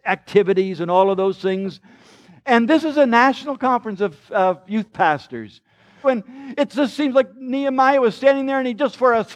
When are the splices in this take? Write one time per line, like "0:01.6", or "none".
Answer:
0:06.0